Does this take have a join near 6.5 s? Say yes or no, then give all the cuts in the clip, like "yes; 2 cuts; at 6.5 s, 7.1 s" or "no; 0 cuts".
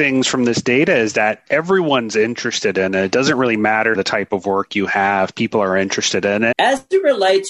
yes; 2 cuts; at 3.9 s, 6.5 s